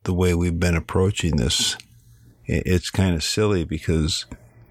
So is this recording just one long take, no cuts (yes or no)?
yes